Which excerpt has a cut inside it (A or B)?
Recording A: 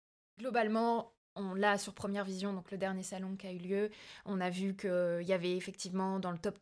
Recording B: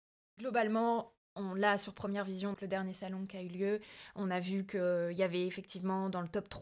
B